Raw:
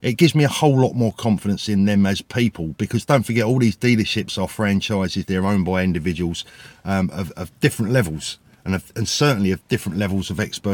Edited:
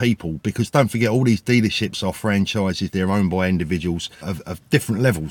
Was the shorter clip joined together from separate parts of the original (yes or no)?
yes